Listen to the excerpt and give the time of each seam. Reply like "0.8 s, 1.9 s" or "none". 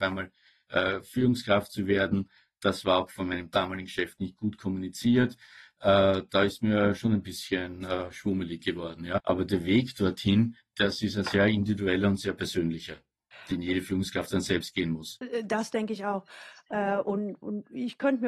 9.2 s